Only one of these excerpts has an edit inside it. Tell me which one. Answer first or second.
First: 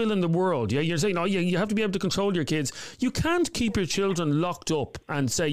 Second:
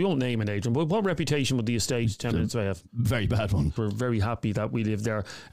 second